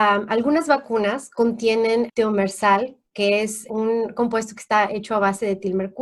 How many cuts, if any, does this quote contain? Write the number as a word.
two